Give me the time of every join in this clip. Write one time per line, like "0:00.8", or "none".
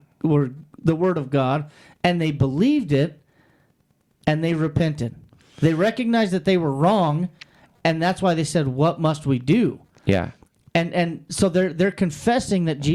none